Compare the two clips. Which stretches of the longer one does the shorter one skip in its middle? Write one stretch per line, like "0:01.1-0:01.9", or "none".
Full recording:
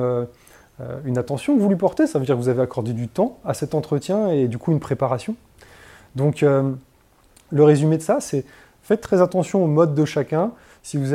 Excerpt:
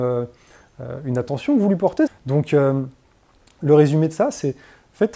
0:02.1-0:06.0